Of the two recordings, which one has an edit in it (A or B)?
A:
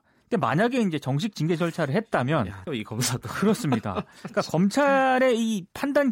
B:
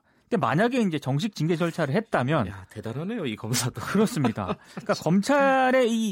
A